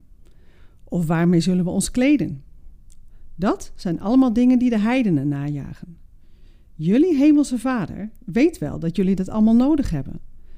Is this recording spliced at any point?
no; 0 cuts

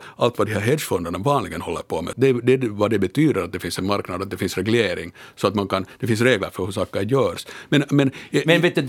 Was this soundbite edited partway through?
yes; 2 cuts; at 2.1 s, 7.7 s

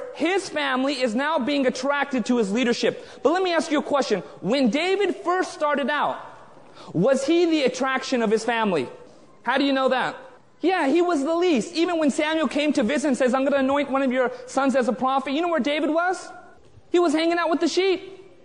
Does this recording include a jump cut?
no; 0 cuts

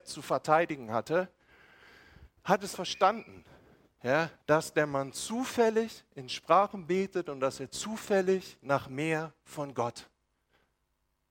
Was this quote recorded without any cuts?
no; 2 cuts; at 2.7 s, 4.4 s

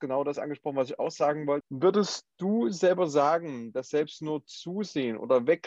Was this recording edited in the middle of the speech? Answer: yes; 1 cut; at 1.6 s

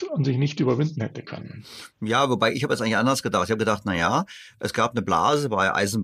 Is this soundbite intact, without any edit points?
yes; 0 cuts

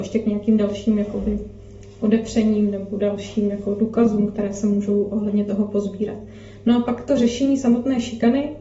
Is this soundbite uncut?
yes; 0 cuts

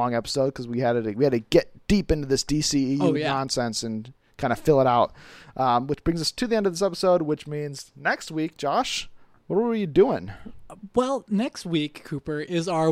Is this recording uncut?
yes; 0 cuts

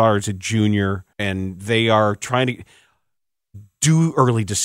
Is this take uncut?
no; 1 cut; at 1.1 s

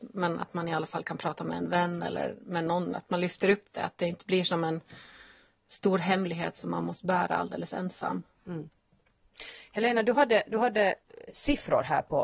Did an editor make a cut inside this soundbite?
no; 0 cuts

